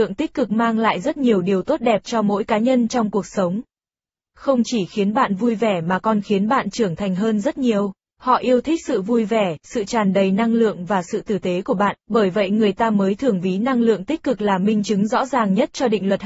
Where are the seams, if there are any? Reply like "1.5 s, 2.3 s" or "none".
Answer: 8.1 s, 12.0 s